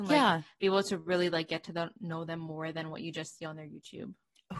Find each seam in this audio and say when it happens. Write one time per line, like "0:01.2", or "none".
none